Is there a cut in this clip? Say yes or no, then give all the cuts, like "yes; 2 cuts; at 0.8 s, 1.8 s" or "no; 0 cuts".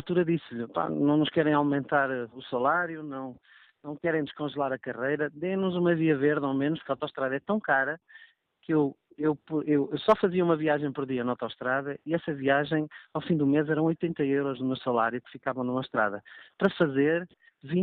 no; 0 cuts